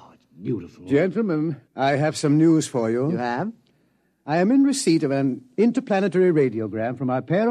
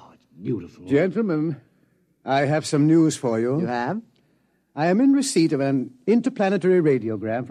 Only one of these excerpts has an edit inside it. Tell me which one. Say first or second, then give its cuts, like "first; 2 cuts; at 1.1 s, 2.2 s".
first; 1 cut; at 1.6 s